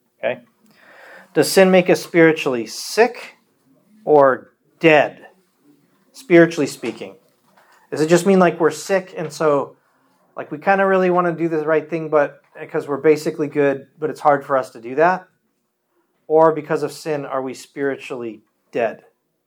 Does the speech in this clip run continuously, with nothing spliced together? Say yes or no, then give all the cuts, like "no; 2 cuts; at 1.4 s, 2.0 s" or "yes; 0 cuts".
yes; 0 cuts